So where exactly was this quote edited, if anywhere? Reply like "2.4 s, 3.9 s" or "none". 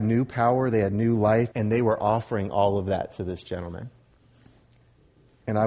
1.5 s